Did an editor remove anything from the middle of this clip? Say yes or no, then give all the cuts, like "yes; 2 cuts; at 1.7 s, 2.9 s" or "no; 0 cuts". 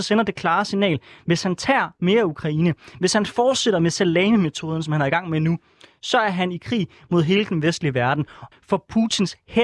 yes; 1 cut; at 8.5 s